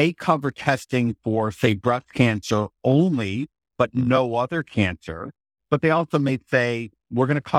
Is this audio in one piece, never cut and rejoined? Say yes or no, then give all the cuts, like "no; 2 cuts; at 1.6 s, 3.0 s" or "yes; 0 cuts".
yes; 0 cuts